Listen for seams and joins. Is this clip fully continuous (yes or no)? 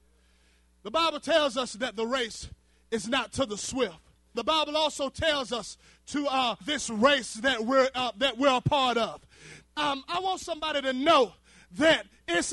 no